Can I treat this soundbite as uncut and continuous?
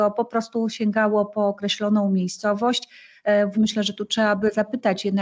no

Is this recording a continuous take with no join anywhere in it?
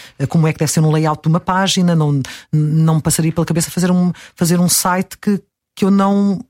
yes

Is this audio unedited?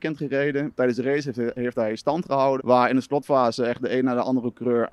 no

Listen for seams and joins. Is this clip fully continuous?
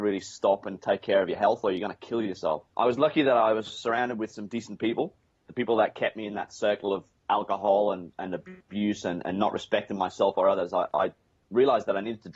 no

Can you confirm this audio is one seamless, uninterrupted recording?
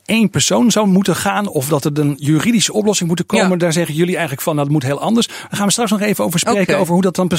yes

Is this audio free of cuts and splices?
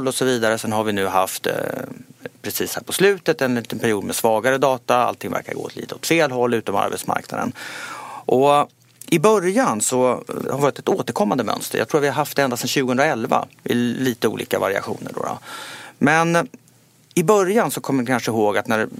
no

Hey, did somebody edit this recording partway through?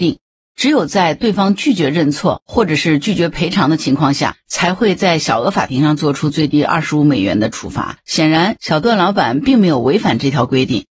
no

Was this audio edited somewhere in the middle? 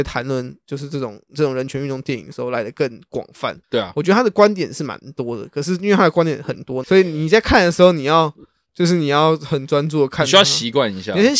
yes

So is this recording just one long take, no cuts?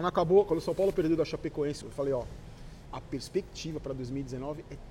no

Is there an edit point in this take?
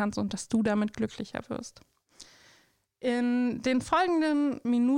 no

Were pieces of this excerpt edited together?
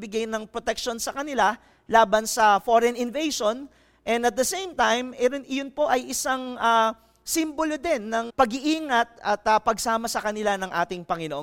yes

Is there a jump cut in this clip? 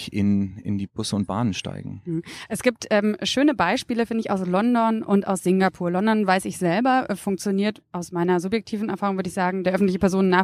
no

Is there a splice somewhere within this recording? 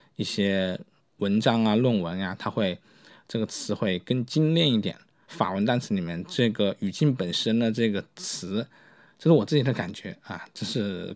yes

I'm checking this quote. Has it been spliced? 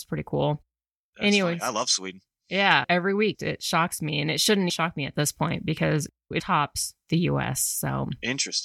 yes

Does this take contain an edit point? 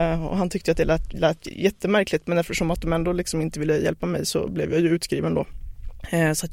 no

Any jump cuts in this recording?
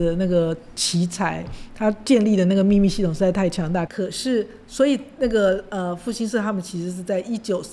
yes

